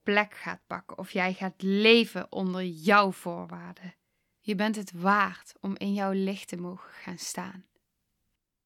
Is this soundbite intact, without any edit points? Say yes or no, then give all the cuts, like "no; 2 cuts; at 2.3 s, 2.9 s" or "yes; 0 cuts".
no; 1 cut; at 4.4 s